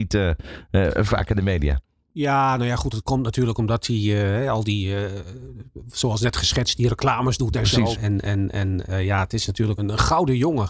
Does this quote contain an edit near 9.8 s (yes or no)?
yes